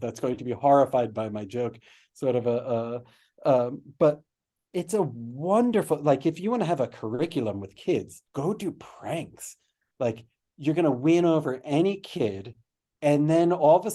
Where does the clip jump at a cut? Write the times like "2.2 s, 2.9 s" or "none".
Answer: 8.3 s